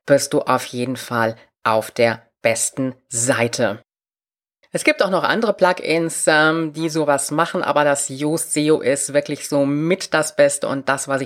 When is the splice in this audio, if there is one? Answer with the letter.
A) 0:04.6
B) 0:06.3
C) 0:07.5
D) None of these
D